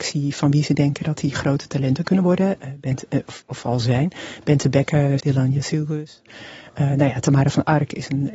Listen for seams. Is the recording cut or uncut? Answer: cut